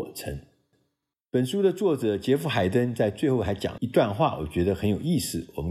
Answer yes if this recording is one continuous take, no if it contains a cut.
no